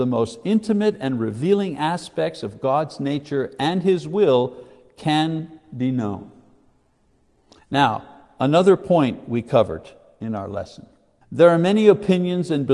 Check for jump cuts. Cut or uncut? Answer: cut